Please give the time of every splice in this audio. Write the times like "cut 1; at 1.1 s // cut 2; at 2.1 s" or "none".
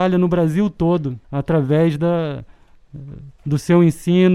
cut 1; at 1.2 s